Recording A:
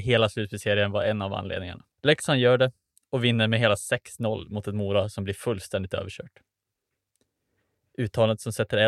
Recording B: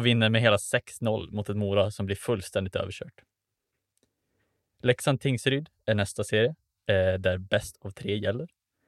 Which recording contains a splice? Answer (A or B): A